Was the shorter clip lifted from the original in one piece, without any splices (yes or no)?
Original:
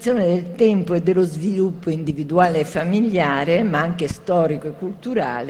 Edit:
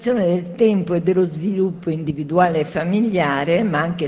yes